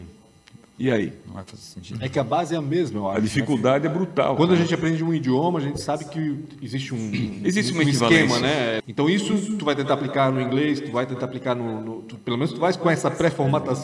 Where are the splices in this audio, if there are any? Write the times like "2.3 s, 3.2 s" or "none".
8.8 s